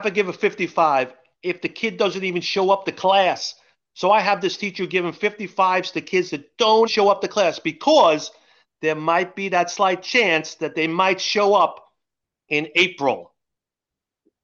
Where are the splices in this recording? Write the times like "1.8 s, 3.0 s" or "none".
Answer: 6.9 s